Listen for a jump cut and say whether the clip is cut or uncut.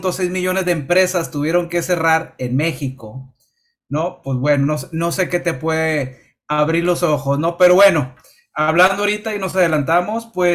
uncut